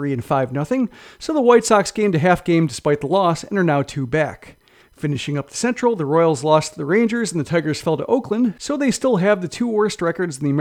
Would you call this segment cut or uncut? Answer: cut